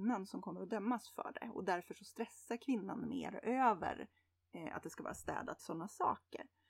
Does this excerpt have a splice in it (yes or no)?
yes